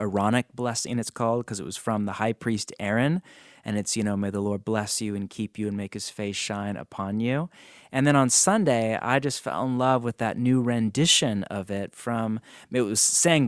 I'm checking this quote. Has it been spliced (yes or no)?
no